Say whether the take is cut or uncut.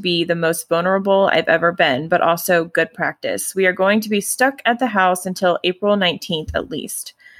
uncut